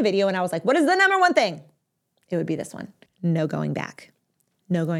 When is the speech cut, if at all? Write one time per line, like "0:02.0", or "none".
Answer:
0:03.1